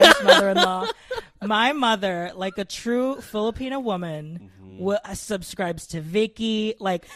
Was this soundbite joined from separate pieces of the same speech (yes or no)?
no